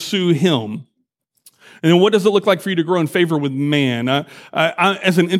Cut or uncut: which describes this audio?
uncut